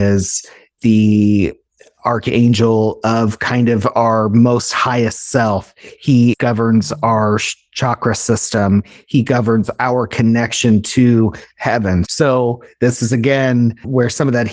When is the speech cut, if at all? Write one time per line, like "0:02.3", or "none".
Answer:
0:12.0